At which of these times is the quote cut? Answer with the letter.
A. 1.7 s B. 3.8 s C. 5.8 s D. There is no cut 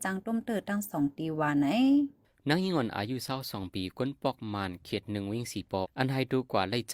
C